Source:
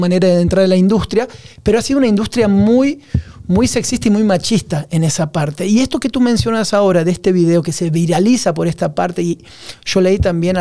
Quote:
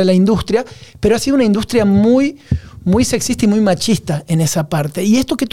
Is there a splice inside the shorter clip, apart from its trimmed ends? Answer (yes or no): no